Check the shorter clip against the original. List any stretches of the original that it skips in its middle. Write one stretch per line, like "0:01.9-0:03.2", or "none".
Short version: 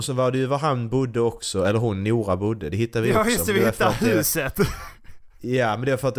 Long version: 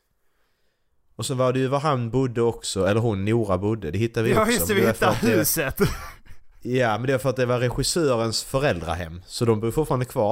none